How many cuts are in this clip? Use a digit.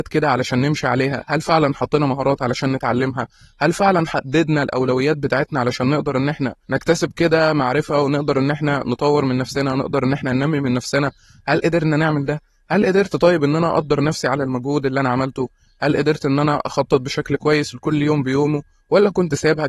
1